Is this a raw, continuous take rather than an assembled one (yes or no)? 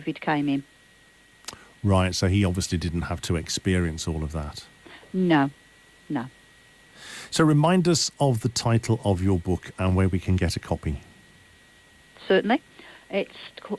yes